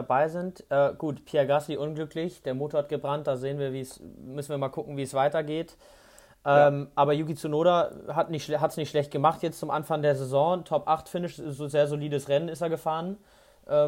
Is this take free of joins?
yes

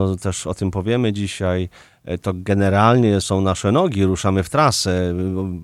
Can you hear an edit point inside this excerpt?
yes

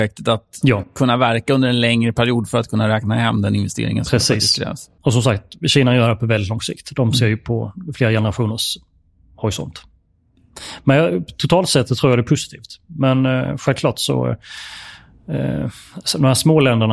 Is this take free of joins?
yes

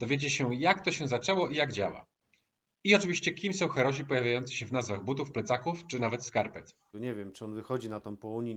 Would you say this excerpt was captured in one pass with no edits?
no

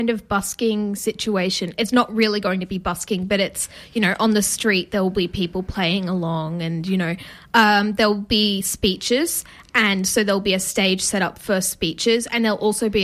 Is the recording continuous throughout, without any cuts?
yes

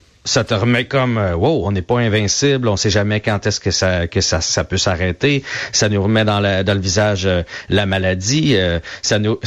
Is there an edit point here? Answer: no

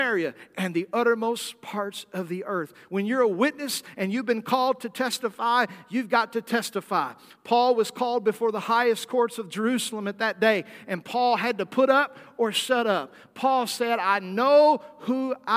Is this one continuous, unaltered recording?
yes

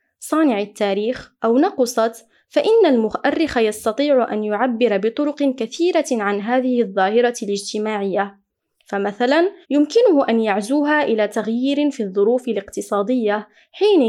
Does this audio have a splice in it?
yes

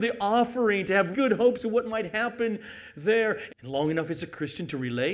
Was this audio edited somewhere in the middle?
yes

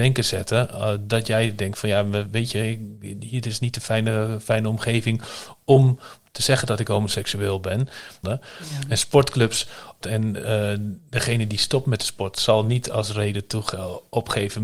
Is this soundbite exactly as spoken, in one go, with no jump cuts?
no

